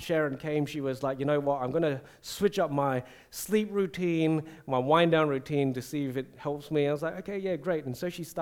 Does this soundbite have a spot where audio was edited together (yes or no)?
no